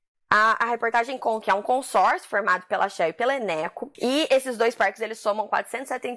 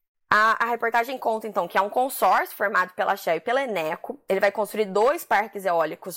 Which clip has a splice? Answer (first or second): first